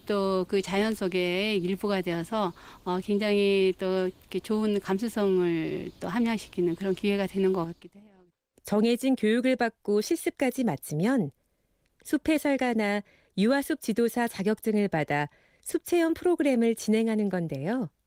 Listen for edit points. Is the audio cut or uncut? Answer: cut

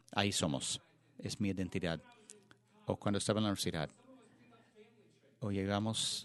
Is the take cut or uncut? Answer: uncut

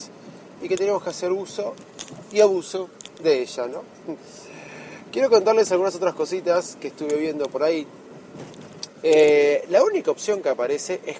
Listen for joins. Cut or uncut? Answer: cut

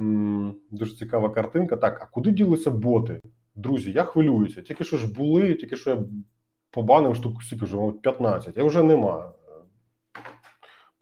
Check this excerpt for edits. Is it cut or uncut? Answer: uncut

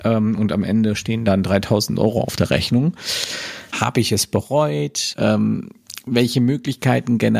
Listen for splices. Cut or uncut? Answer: cut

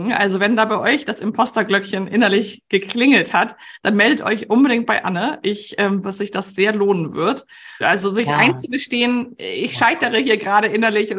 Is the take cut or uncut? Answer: cut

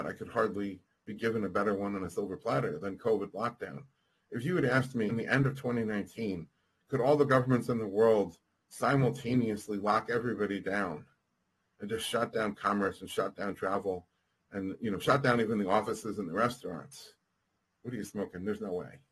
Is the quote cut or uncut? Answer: cut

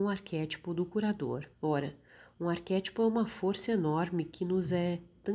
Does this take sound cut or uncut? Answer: cut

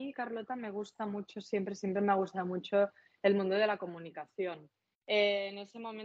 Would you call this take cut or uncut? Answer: cut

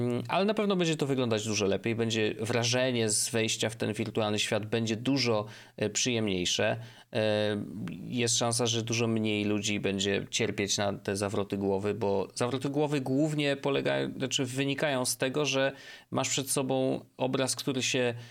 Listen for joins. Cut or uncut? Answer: uncut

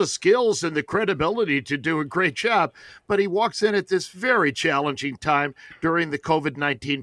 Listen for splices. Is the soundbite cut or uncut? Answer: uncut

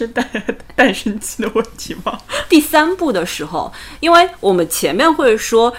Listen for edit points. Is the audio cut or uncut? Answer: uncut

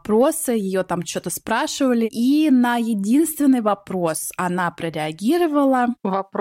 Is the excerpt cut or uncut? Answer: uncut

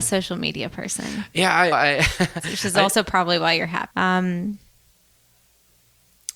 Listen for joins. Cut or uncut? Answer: cut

